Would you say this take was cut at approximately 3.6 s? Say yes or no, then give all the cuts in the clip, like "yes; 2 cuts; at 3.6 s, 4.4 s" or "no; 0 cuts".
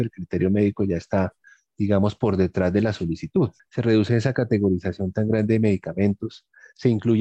yes; 1 cut; at 3.6 s